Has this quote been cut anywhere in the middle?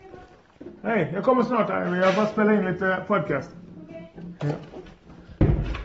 no; 0 cuts

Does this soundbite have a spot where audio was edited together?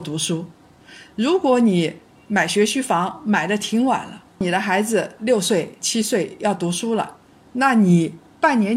no; 0 cuts

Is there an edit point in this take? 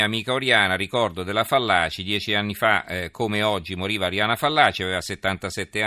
no; 0 cuts

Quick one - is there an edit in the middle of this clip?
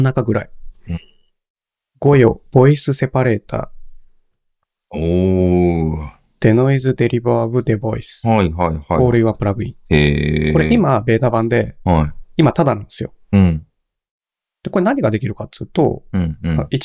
no; 0 cuts

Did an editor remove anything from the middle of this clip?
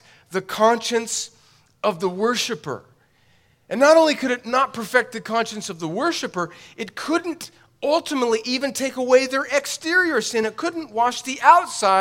no; 0 cuts

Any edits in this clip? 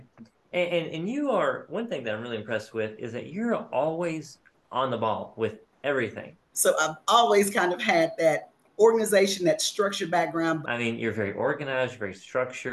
yes; 2 cuts; at 6.5 s, 10.6 s

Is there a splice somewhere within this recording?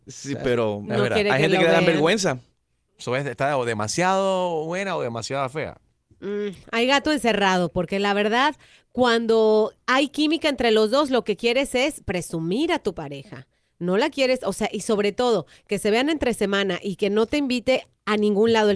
no; 0 cuts

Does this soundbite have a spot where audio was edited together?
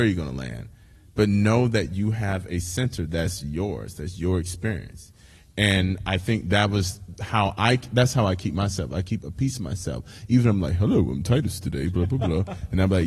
no; 0 cuts

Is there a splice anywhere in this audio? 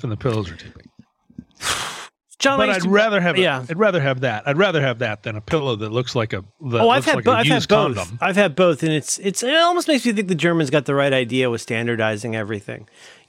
no; 0 cuts

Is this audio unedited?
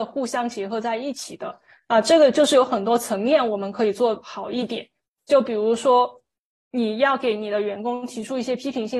yes; 0 cuts

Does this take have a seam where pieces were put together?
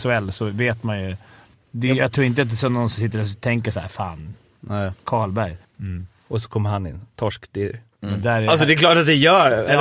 yes; 1 cut; at 5.6 s

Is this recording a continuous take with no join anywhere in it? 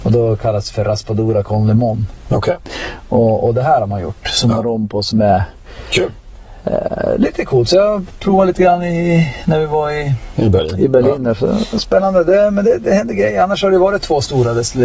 yes; 0 cuts

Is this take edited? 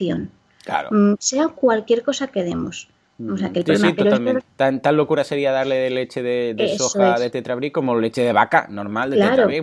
yes; 1 cut; at 4.4 s

